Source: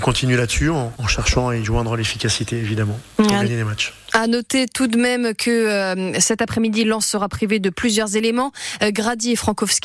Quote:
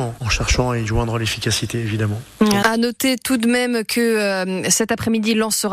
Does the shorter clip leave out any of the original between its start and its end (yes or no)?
yes